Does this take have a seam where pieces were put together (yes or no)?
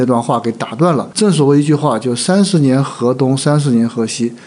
yes